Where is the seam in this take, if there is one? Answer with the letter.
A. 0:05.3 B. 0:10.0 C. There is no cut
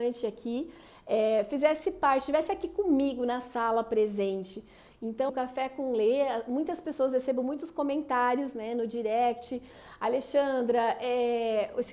A